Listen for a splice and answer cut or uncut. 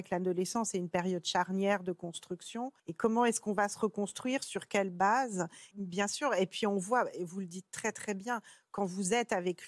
cut